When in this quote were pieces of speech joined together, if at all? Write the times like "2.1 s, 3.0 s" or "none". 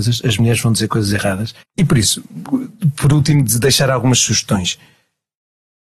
1.6 s